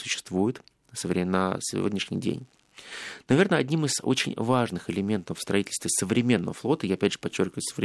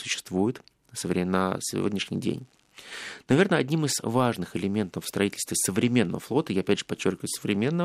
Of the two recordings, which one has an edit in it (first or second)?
second